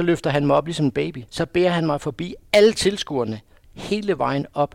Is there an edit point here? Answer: yes; 1 cut; at 1.3 s

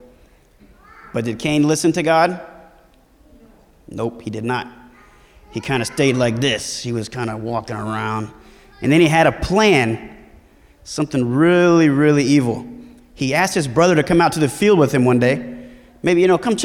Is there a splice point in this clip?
no; 0 cuts

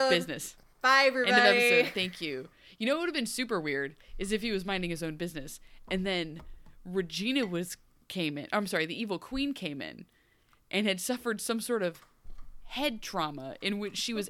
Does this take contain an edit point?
no; 0 cuts

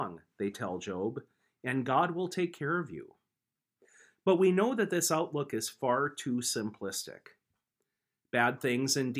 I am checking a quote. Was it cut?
no; 0 cuts

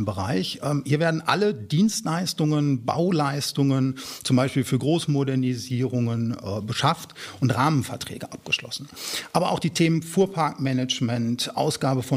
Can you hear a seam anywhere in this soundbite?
no; 0 cuts

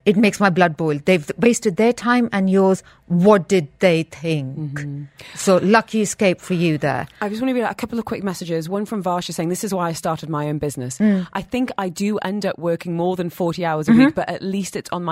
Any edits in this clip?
no; 0 cuts

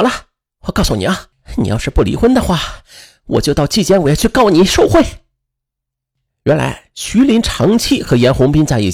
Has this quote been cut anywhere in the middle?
no; 0 cuts

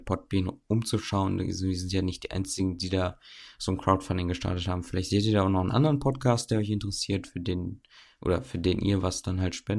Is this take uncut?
yes; 0 cuts

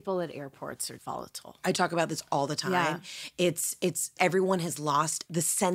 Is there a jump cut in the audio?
yes; 2 cuts; at 1.0 s, 4.2 s

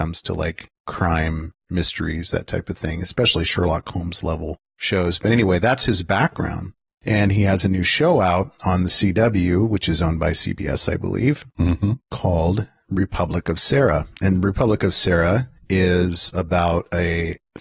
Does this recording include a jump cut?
no; 0 cuts

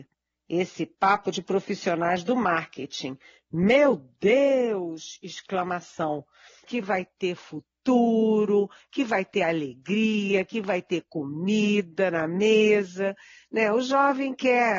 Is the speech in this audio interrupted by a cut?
yes; 1 cut; at 6.6 s

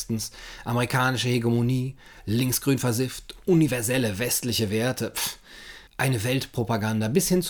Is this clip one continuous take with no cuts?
no; 1 cut; at 5.9 s

